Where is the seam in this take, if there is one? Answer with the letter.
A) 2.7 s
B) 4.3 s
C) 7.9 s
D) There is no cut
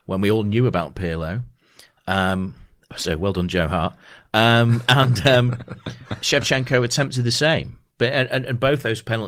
D